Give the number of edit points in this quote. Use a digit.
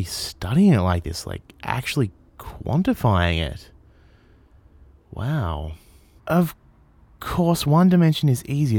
1